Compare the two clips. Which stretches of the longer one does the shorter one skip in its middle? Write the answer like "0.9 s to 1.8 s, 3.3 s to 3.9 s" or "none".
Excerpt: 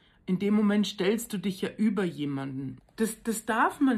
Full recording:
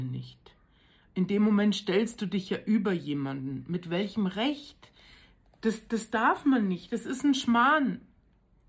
3.7 s to 5.4 s